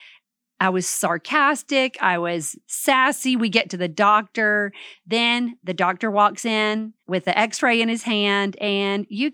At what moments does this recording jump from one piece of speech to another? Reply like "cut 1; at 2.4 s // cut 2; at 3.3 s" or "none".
cut 1; at 4.9 s // cut 2; at 7.0 s